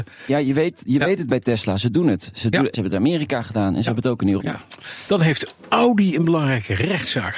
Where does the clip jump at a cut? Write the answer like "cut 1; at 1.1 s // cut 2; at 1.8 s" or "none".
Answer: cut 1; at 2.7 s // cut 2; at 4.4 s